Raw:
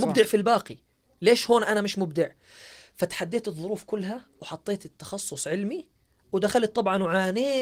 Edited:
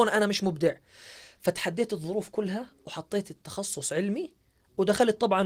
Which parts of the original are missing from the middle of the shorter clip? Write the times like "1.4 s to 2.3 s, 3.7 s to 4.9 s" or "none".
none